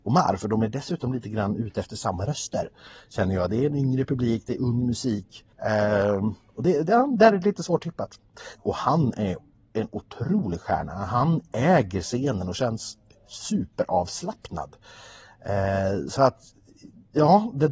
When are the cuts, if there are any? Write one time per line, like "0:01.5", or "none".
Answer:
0:05.5
0:08.6